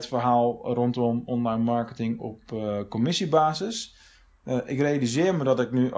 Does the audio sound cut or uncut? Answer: uncut